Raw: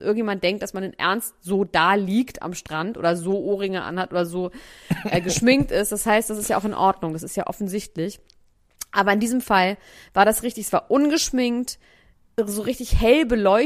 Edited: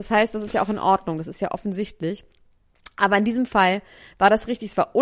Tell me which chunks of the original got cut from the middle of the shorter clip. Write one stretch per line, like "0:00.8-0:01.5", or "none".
none